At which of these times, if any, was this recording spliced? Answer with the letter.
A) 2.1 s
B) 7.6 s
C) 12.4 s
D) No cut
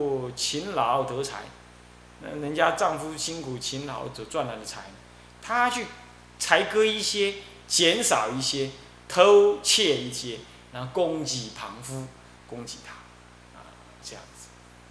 C